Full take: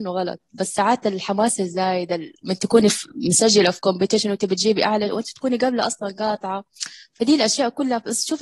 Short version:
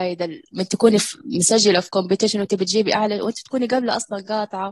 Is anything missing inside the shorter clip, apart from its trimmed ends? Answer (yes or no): no